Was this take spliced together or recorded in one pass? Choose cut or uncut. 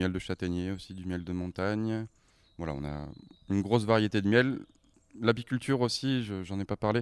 uncut